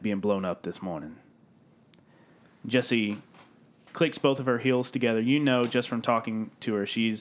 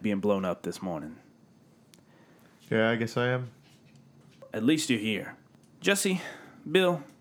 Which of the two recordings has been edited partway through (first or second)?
second